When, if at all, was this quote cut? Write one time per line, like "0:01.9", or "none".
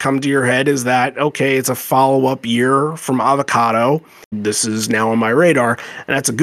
0:04.3